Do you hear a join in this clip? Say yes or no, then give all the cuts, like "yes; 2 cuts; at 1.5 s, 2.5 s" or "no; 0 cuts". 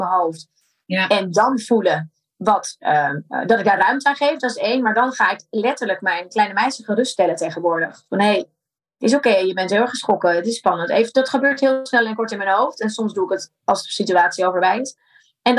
no; 0 cuts